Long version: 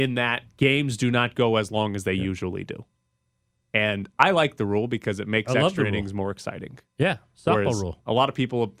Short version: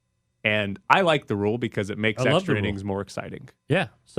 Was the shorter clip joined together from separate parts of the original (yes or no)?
no